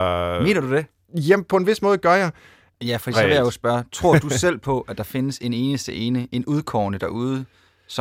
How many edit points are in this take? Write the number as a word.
one